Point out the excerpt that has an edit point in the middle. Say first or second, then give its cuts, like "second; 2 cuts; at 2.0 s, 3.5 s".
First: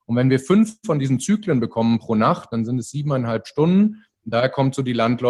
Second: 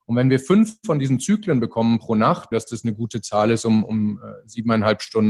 second; 1 cut; at 2.5 s